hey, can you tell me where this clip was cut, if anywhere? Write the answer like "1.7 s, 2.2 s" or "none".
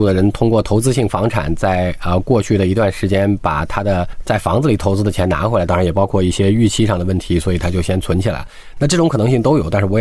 5.7 s